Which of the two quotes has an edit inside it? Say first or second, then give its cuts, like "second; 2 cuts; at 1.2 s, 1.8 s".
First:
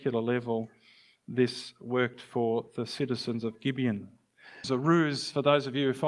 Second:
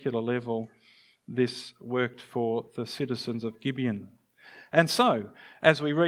first; 1 cut; at 4.6 s